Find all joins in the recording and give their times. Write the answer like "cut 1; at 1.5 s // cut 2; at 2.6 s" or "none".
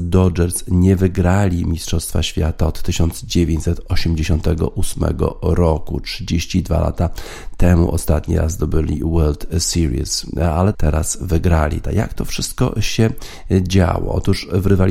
cut 1; at 10.7 s // cut 2; at 11.8 s